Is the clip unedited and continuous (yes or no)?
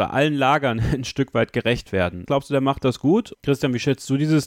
no